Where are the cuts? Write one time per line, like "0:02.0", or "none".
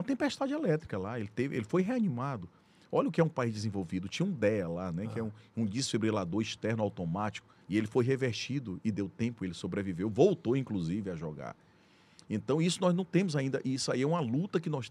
0:07.6